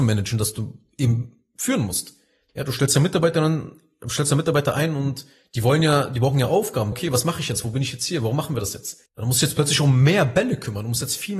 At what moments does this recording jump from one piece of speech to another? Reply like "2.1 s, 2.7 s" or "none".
2.5 s, 6.9 s, 9.1 s